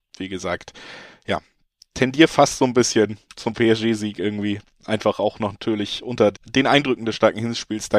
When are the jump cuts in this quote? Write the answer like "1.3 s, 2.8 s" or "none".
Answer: 3.3 s, 6.3 s